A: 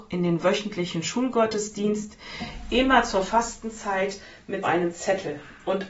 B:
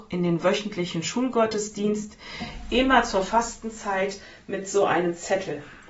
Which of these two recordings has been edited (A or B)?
A